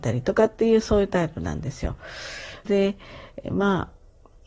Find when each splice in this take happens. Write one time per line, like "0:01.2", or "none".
0:02.7